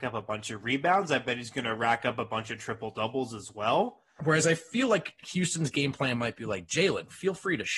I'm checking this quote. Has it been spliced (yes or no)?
yes